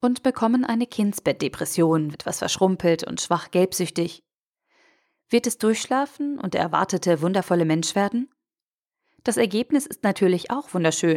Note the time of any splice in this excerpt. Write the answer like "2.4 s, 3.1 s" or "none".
2.1 s